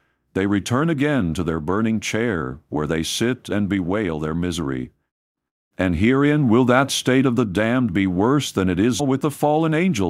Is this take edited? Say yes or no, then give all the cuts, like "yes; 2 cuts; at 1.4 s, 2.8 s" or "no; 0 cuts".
yes; 2 cuts; at 5.7 s, 9.0 s